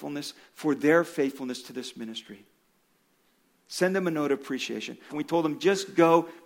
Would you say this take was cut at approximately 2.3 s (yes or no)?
no